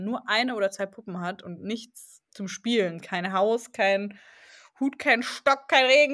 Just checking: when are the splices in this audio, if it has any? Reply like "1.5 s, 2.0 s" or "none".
2.3 s